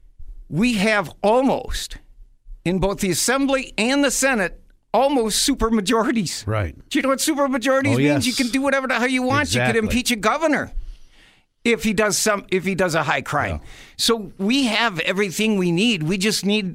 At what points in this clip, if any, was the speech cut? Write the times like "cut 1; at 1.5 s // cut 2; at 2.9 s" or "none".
none